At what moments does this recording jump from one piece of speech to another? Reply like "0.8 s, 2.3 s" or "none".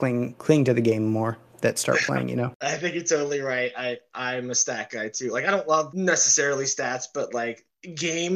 none